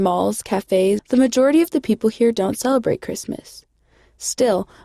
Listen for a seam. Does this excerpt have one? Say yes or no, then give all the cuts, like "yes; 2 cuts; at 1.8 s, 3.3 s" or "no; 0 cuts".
yes; 1 cut; at 1.0 s